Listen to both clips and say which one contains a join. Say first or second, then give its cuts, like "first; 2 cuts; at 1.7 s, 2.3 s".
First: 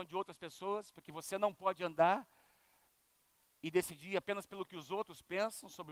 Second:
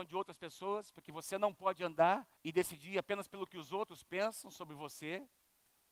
second; 1 cut; at 2.4 s